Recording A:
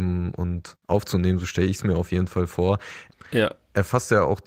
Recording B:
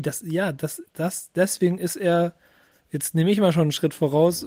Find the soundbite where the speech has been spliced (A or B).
A